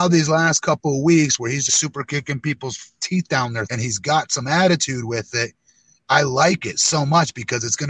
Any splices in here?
yes; 2 cuts; at 1.7 s, 3.7 s

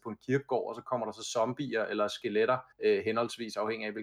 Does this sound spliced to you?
yes; 1 cut; at 2.7 s

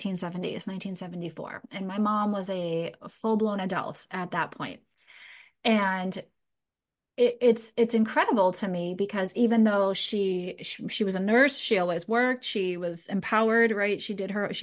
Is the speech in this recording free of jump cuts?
yes; 0 cuts

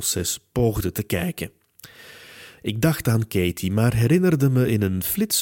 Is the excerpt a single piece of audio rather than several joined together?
no; 1 cut; at 2.6 s

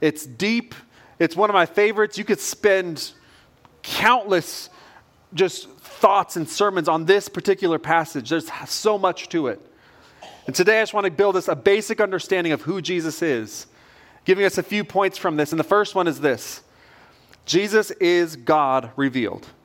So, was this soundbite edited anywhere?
no; 0 cuts

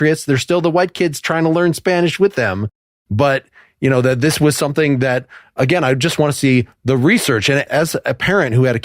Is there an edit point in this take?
no; 0 cuts

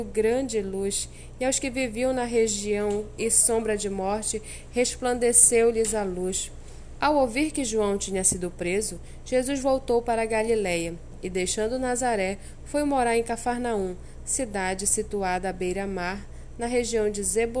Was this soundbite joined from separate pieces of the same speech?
yes; 1 cut; at 7.0 s

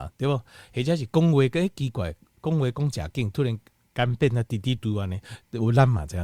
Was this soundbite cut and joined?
yes; 1 cut; at 4.8 s

